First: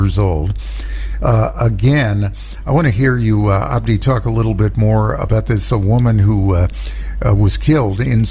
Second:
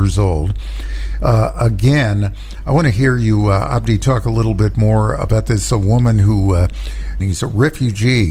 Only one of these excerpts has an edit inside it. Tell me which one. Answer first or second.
second